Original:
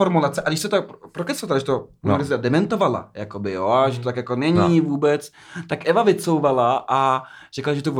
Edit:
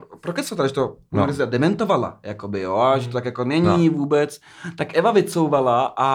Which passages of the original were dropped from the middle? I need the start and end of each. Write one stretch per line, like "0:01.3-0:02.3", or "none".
none